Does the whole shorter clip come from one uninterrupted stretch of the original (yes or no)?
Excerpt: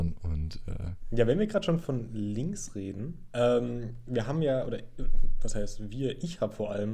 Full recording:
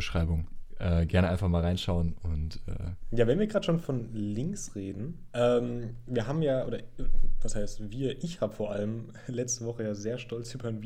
yes